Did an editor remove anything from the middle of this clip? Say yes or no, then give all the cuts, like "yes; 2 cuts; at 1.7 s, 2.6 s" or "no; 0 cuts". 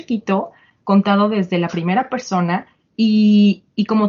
no; 0 cuts